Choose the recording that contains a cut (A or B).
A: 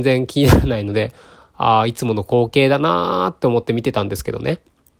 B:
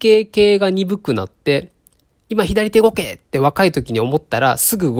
B